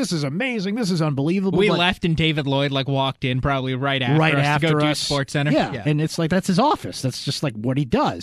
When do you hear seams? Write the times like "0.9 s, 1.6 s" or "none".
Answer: none

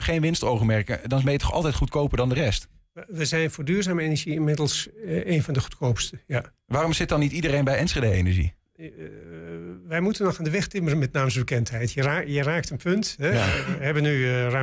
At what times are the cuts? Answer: none

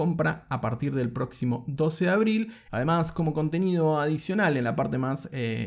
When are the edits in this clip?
2.7 s

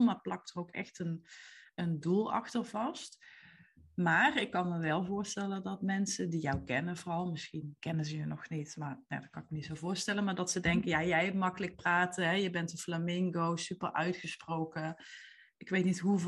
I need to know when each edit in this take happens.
none

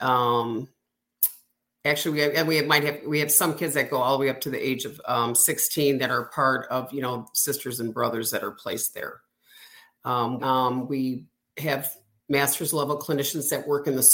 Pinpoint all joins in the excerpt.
10.4 s

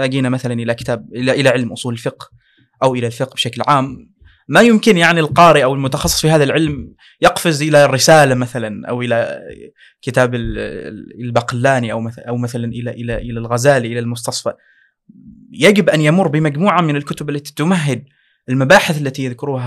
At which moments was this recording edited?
none

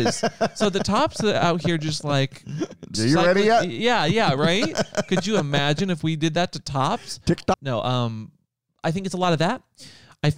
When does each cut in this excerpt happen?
2.9 s, 7.5 s

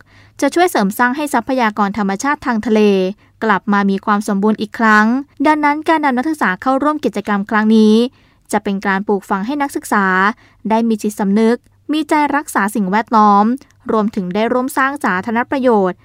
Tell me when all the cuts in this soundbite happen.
5.3 s

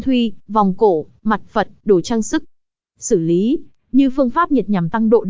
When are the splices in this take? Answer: 3.8 s

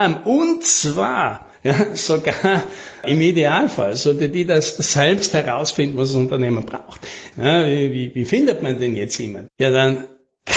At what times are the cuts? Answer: 1.6 s, 7.3 s, 9.5 s

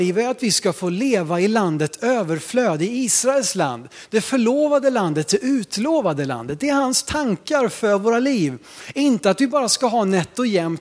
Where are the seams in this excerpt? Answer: none

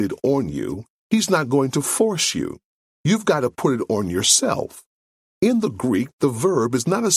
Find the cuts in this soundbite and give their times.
5.2 s

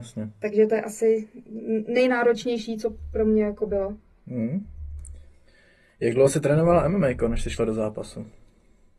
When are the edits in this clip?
none

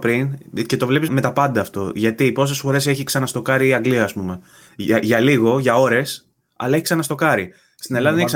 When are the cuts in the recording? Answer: 1.1 s

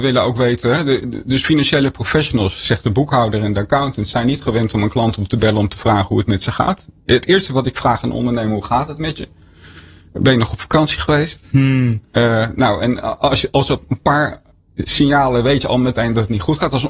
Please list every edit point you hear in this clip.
12.1 s

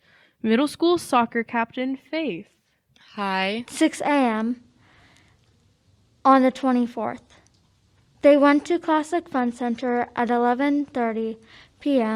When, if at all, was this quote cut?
3.6 s

